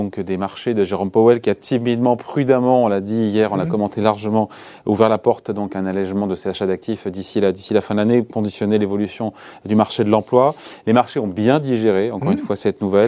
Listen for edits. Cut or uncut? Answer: uncut